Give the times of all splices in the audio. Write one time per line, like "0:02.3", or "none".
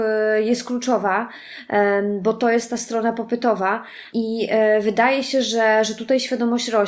none

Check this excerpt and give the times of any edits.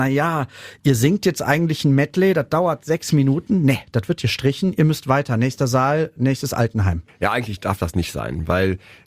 none

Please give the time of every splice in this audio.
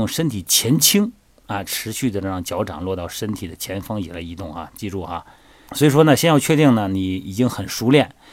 0:05.7

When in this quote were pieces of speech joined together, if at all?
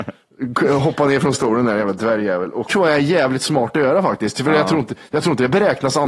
0:02.7

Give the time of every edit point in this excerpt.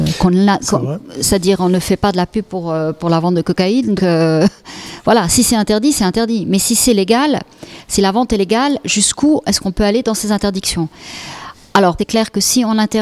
0:04.0
0:12.0

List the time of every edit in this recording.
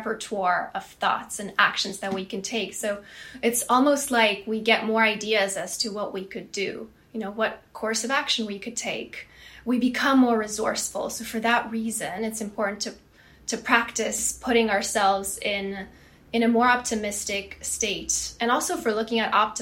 none

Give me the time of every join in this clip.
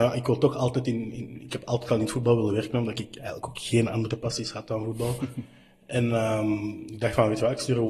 none

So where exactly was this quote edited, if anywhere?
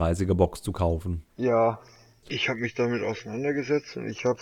0:02.2

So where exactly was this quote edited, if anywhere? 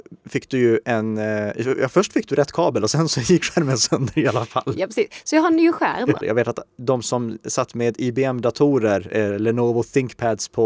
0:06.2

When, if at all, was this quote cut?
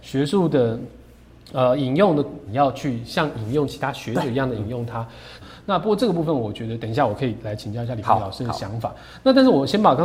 0:02.5
0:05.4

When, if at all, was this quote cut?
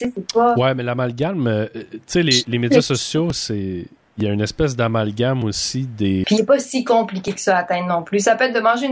0:06.2

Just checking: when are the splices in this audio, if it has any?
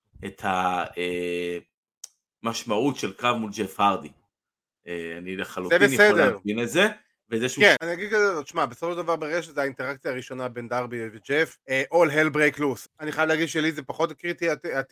0:07.8
0:11.6
0:12.9

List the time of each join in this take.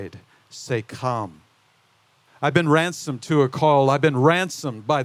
0:02.3

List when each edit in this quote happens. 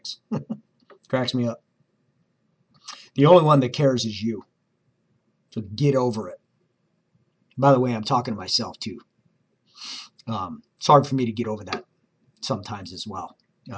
none

